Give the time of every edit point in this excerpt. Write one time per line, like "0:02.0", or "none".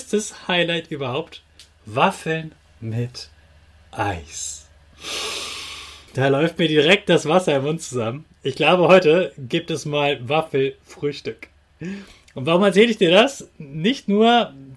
0:06.1

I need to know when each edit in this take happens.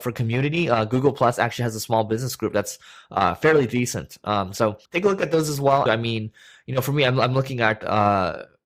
0:04.8
0:05.9

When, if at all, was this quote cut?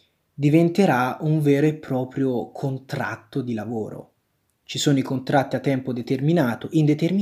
none

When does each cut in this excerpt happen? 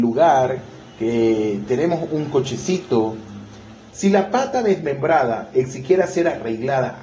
0:03.9

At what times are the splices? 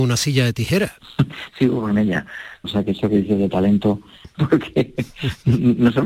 0:02.6
0:04.3

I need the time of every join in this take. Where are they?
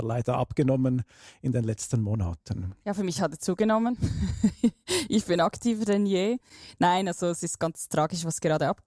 none

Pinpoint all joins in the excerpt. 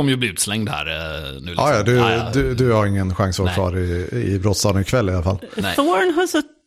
none

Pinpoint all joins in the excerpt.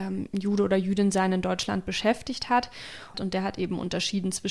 0:03.1

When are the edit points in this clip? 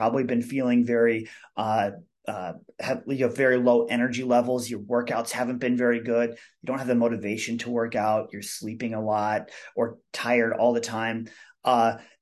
none

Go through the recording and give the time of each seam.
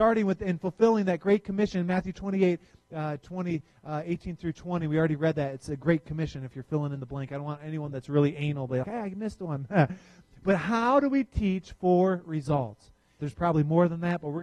0:08.8
0:13.2

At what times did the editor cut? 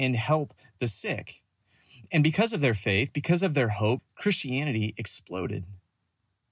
0:04.0

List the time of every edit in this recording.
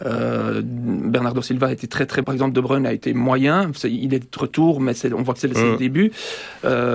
0:02.2

